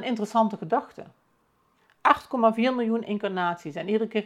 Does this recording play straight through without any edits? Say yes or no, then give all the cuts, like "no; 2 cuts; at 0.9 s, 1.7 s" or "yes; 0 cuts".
yes; 0 cuts